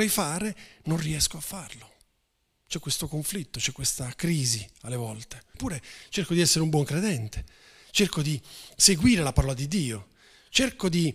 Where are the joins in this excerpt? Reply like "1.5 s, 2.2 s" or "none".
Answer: 5.5 s